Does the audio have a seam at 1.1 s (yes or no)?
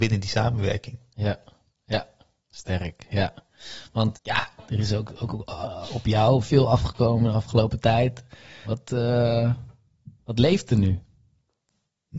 no